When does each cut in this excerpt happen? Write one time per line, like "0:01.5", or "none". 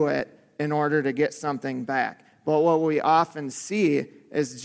none